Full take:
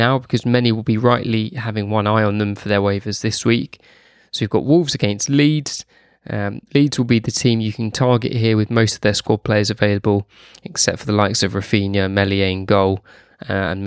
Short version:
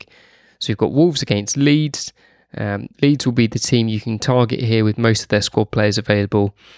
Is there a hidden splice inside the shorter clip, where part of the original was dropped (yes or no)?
no